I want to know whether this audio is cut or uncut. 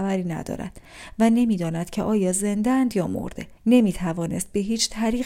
cut